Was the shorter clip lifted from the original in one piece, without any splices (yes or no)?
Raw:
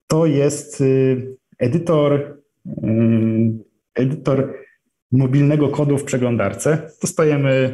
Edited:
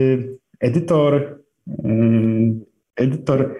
yes